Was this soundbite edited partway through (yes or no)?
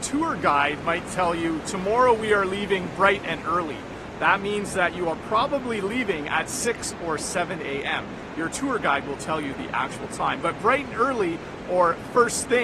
no